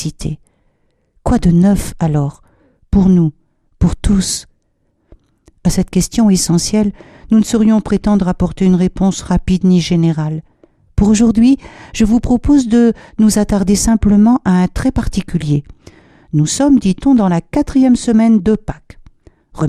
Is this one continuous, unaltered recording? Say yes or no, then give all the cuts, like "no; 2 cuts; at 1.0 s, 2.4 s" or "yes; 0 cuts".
yes; 0 cuts